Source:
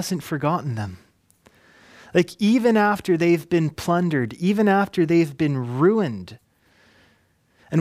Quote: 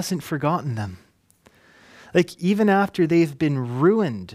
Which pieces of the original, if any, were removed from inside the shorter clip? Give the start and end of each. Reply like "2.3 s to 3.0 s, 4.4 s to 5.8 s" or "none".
2.4 s to 4.4 s